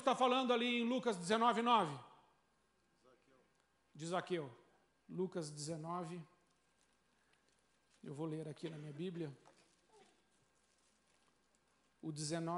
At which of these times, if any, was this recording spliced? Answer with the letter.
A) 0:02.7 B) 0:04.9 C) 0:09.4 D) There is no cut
B